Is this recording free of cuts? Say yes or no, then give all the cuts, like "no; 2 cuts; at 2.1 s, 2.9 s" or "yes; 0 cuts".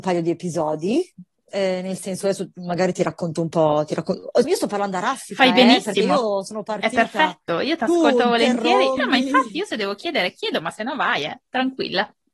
no; 2 cuts; at 4.4 s, 9.0 s